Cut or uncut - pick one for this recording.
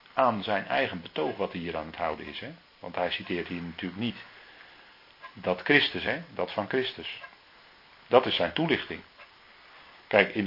uncut